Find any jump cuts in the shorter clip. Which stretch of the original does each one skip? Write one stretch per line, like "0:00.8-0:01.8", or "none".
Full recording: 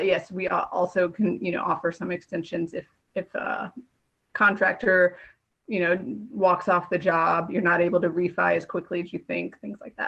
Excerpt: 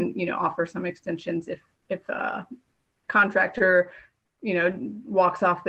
none